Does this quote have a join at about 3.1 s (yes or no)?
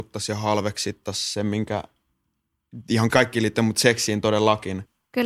yes